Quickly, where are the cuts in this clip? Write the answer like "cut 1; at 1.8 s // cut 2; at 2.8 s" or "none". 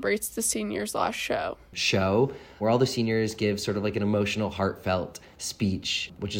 cut 1; at 1.7 s